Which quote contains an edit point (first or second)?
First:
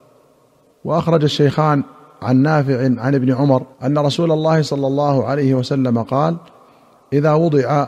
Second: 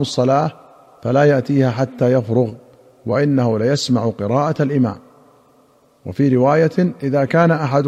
first